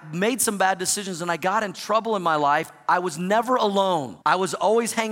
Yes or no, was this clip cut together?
yes